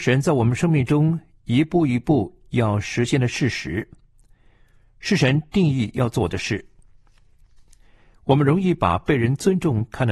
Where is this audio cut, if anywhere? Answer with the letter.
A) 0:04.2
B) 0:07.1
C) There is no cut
C